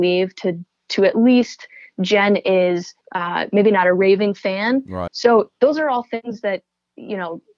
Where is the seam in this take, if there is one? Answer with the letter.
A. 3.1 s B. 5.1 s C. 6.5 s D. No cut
B